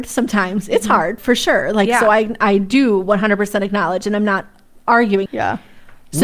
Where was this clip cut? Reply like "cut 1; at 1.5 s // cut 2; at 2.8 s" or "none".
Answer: cut 1; at 5.3 s